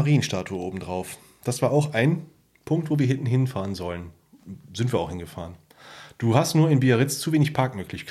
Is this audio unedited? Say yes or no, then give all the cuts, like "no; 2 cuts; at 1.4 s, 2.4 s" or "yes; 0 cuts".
yes; 0 cuts